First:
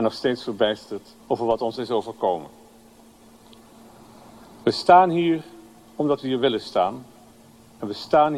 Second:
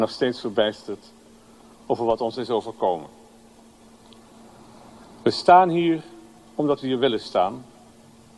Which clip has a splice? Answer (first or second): first